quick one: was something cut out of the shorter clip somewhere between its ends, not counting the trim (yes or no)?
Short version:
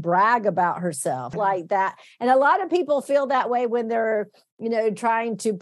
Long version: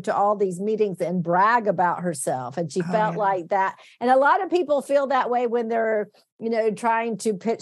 yes